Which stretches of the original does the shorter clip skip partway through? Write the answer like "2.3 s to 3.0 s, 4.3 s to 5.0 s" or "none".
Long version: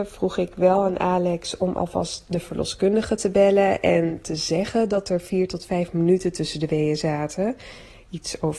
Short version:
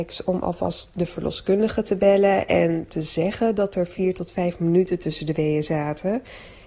none